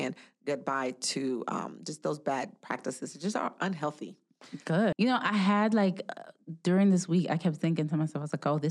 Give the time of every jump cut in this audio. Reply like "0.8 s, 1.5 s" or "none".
4.9 s

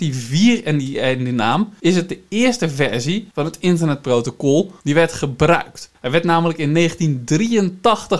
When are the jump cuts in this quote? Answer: 6.0 s

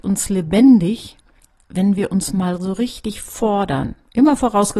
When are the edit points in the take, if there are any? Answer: none

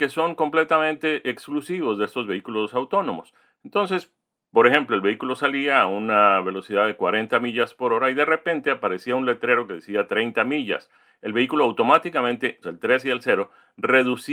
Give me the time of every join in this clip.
3.4 s, 12.6 s

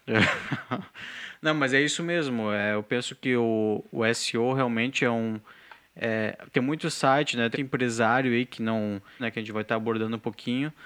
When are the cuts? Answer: 7.5 s, 9.2 s

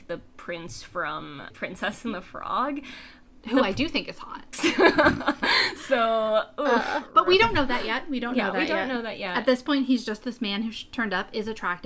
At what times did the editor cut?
4.5 s

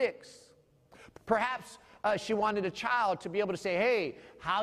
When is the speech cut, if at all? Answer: 1.1 s

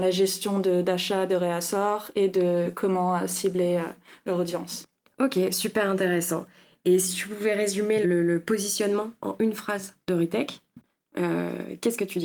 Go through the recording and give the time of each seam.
8.0 s

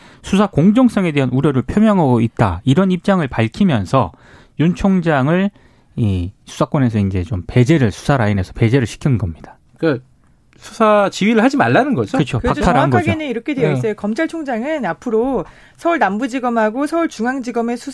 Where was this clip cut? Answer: 9.7 s

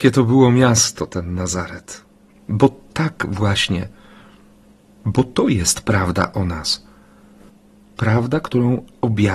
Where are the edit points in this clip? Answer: 2.4 s

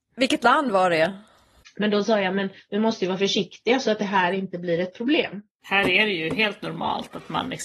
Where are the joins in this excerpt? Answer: 1.6 s, 5.6 s

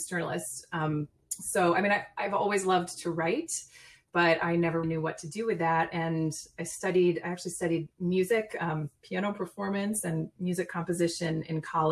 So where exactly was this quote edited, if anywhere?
4.8 s

